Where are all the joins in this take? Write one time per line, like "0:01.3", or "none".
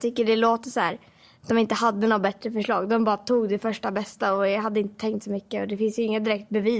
none